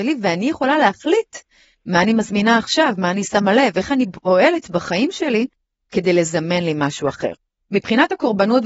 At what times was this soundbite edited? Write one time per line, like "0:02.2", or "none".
none